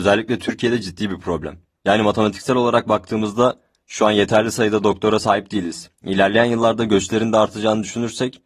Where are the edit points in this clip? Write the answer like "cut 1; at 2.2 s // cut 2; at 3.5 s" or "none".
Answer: cut 1; at 5.9 s